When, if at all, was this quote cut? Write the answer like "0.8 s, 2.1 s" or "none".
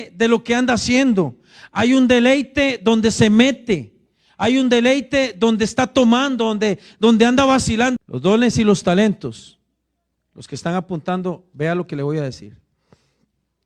8.0 s